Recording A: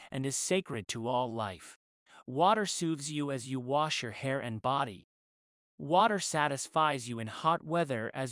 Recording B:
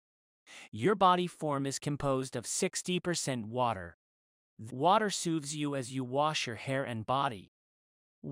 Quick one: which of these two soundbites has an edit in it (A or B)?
B